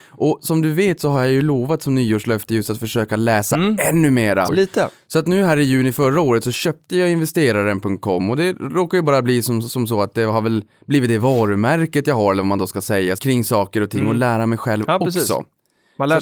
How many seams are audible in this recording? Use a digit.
2